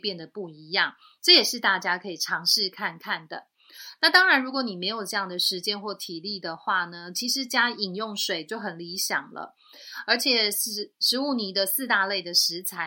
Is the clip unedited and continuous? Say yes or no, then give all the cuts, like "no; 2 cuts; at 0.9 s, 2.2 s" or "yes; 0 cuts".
yes; 0 cuts